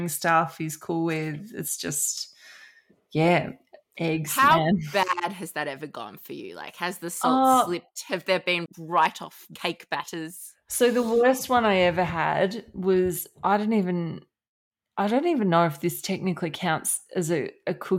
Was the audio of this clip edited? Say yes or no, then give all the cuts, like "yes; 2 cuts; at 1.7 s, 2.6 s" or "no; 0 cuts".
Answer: no; 0 cuts